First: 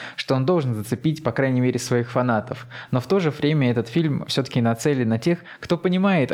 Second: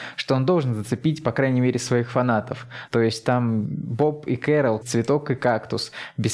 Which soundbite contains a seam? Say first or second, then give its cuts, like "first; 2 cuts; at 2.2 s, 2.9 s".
second; 2 cuts; at 2.9 s, 4.8 s